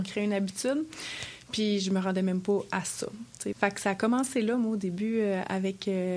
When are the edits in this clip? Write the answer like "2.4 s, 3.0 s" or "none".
3.5 s